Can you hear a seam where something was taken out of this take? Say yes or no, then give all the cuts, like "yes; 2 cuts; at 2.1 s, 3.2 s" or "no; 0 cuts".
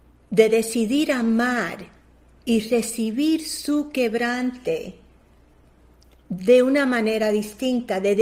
no; 0 cuts